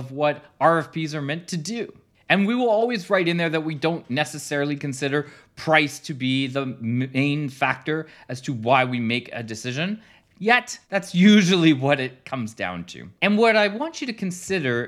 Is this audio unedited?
no; 2 cuts; at 10.8 s, 13.2 s

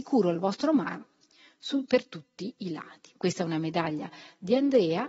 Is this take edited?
yes; 1 cut; at 3.2 s

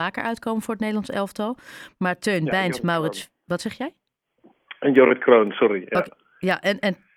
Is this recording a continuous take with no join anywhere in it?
yes; 0 cuts

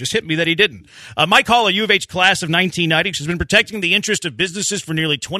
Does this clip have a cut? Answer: yes; 1 cut; at 3.1 s

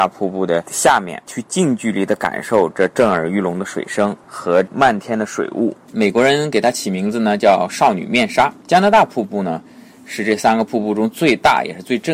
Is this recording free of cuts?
no; 1 cut; at 5.8 s

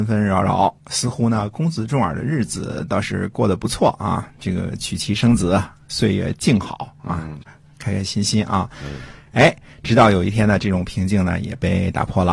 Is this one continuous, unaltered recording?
yes; 0 cuts

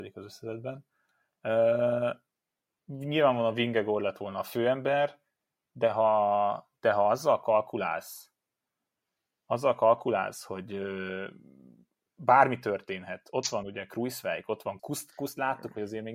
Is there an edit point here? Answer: yes; 1 cut; at 14.8 s

